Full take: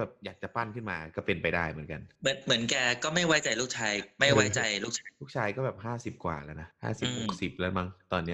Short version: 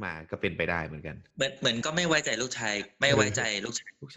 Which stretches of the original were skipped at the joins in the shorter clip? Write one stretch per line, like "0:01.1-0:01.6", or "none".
0:02.7-0:03.0